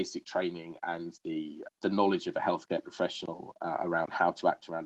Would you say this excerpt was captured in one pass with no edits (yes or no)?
no